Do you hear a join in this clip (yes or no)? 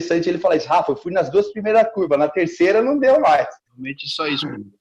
no